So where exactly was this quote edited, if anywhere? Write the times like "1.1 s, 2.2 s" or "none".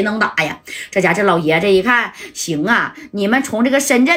none